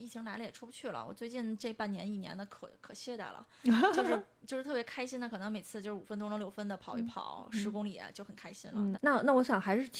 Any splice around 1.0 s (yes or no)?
no